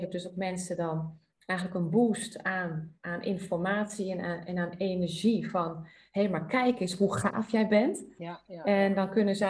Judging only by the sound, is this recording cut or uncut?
uncut